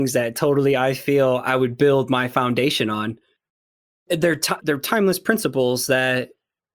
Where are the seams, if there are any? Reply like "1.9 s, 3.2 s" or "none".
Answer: 4.6 s